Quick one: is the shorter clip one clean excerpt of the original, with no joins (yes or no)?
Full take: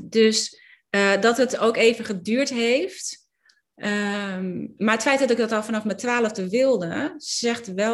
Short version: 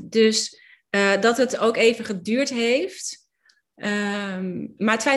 yes